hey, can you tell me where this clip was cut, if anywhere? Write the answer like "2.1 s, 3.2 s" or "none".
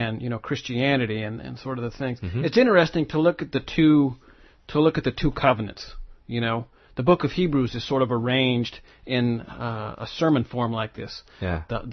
none